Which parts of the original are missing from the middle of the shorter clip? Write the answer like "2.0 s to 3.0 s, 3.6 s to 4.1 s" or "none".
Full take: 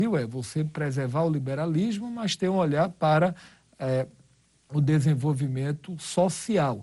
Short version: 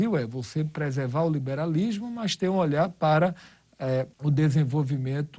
4.1 s to 4.6 s